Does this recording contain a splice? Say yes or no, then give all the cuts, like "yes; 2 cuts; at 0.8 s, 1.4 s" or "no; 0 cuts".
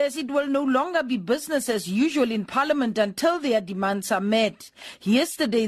no; 0 cuts